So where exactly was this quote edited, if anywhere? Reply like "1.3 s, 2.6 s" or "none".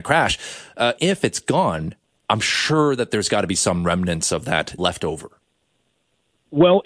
1.0 s, 4.8 s